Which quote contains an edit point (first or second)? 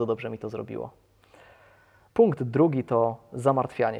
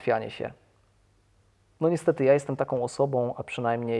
first